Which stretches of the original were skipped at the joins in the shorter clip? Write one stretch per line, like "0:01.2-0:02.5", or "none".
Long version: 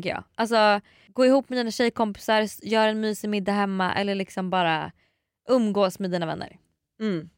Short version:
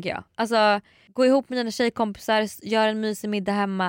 none